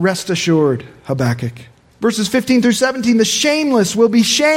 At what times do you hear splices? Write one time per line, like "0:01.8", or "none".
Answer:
0:01.9